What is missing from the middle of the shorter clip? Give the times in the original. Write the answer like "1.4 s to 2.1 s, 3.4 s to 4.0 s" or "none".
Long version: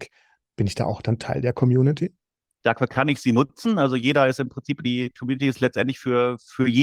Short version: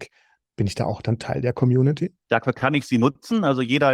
2.2 s to 2.5 s

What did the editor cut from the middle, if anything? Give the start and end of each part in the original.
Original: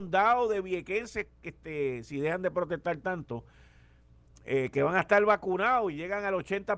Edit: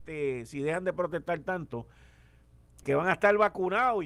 4.4 s to 4.7 s

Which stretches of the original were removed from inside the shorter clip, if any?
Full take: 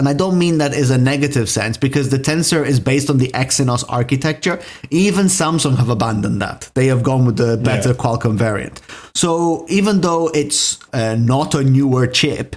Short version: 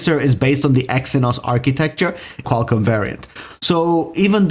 4.9 s to 8.0 s

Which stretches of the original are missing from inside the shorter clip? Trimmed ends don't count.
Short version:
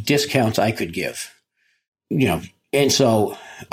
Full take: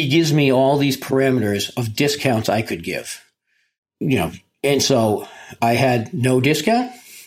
none

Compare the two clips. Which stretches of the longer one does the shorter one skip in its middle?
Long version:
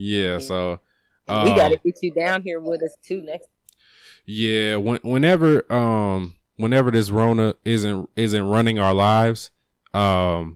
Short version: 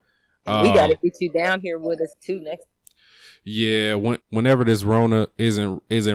5.0 s to 6.4 s

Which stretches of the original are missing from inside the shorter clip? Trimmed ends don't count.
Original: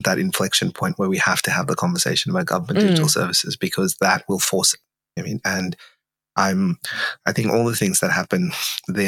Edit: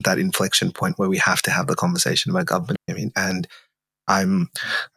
2.8 s to 5.0 s

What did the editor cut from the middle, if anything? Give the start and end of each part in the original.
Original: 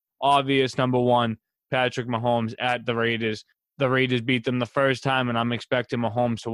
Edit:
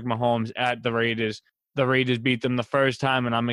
none

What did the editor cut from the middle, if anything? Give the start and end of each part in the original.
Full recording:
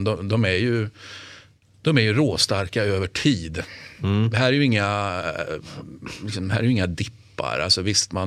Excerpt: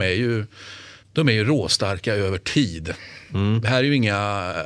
1.5 s to 1.7 s

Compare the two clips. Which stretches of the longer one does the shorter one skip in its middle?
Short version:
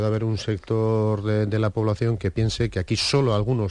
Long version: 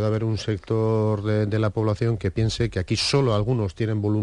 none

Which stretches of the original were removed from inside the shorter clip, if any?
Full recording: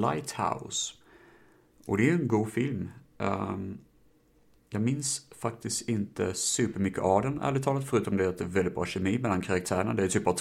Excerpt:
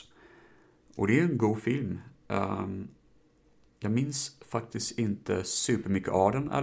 none

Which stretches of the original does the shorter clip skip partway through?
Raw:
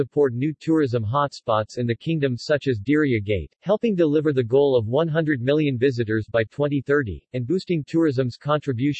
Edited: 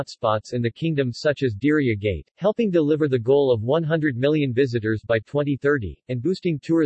none

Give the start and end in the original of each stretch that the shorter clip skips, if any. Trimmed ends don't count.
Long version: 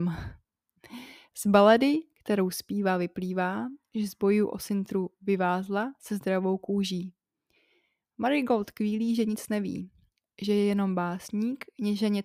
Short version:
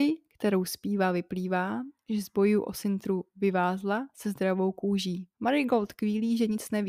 7.2 s to 8.1 s

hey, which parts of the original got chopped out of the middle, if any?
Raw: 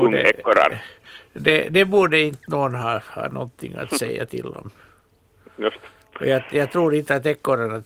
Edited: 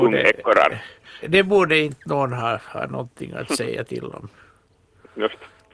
1.2 s to 1.6 s

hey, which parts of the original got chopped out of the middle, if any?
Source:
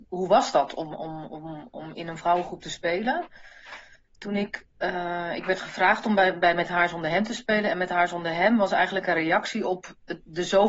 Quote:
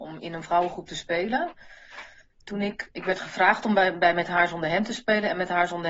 4.7 s to 5.4 s

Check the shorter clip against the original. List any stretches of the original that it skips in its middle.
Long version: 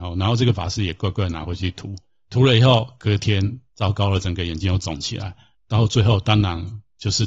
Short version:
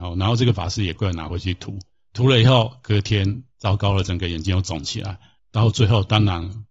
0.9 s to 1.1 s

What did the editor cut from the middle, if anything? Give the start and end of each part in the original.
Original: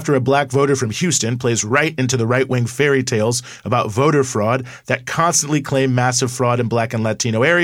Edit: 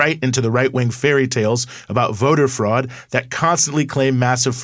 none

